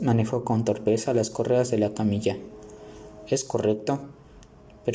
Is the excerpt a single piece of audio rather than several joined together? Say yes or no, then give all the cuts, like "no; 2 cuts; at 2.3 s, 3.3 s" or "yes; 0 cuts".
yes; 0 cuts